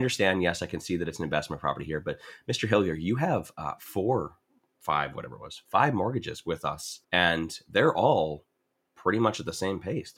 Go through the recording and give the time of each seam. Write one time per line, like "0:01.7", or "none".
0:07.0